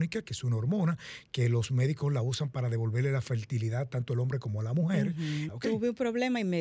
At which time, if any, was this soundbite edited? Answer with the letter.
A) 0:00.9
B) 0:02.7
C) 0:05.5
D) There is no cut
C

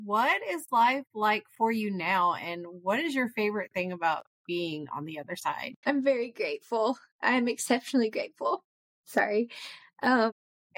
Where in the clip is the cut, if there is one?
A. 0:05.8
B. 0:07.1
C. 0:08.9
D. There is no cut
A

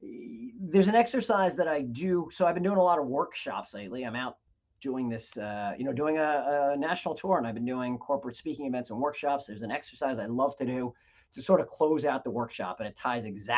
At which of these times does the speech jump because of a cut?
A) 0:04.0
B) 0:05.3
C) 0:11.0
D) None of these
B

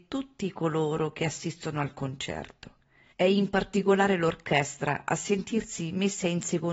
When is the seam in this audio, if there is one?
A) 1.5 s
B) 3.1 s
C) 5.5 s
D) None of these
B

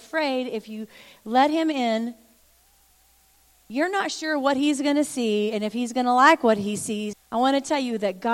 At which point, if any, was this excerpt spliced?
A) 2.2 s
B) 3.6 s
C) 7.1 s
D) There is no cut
C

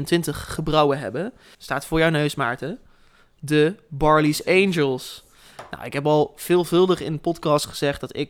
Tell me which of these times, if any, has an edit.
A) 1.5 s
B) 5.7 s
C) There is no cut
A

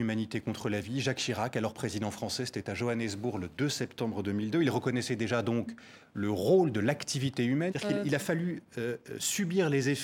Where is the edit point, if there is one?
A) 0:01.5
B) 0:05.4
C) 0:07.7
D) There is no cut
C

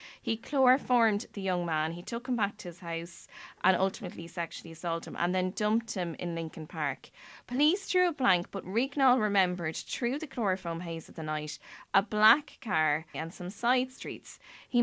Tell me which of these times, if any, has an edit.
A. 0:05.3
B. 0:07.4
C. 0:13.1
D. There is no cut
C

